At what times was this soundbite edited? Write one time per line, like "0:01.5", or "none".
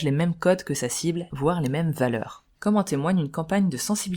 0:01.3
0:02.5